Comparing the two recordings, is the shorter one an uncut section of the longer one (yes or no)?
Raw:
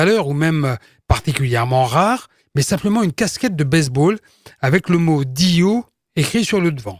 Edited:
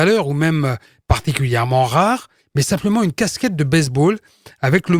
yes